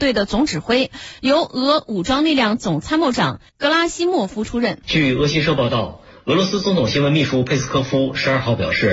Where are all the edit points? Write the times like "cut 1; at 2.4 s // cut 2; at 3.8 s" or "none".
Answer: cut 1; at 3.5 s // cut 2; at 4.8 s